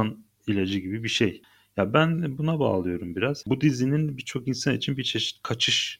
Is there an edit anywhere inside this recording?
yes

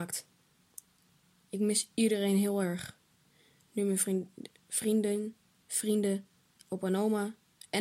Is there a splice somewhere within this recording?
no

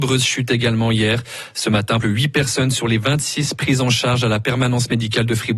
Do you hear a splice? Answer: yes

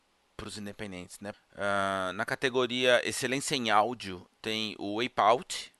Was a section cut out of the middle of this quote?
yes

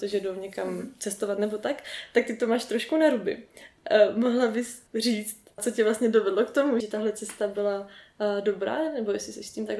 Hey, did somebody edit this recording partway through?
yes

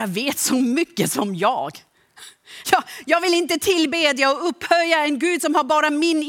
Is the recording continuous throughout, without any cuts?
yes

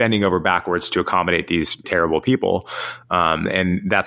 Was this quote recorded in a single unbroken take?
no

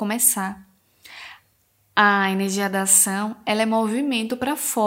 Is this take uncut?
yes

